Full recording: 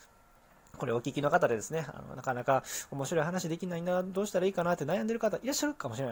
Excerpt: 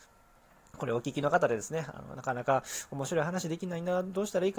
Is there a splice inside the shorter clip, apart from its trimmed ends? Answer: no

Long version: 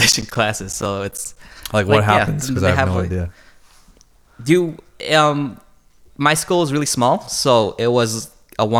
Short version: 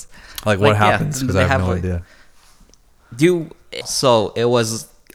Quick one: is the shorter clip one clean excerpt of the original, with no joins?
no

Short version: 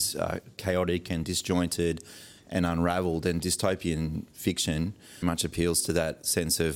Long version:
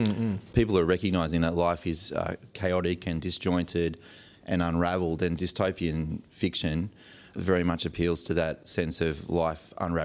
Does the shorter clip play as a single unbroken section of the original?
no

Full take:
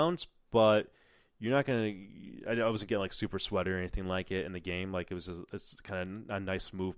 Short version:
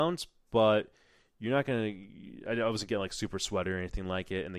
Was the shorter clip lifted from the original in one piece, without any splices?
yes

